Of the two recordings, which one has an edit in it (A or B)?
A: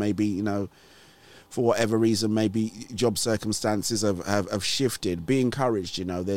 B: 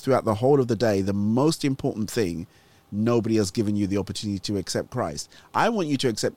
A